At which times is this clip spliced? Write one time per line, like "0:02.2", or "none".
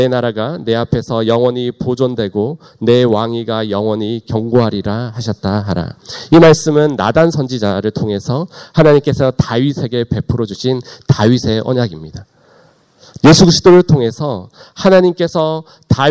0:13.2